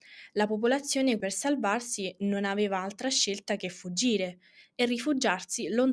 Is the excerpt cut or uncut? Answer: cut